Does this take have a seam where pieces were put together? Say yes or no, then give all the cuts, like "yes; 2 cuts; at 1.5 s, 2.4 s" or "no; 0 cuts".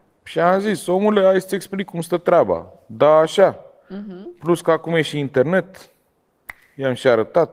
no; 0 cuts